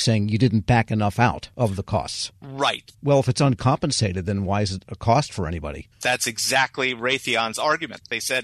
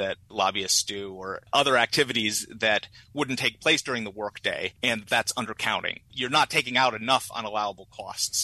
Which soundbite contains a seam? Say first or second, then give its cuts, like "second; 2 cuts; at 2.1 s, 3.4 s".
first; 1 cut; at 2.9 s